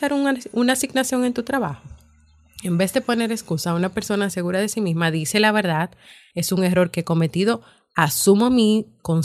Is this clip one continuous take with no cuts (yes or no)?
no